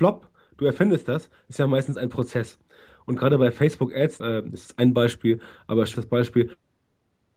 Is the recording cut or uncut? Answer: cut